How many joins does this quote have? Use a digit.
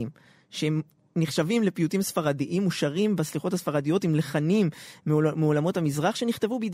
0